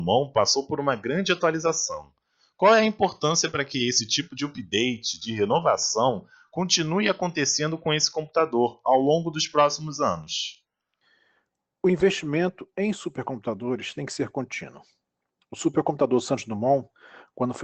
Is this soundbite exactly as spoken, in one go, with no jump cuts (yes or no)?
yes